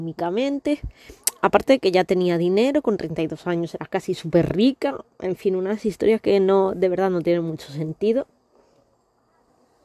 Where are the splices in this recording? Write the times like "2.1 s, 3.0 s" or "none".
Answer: none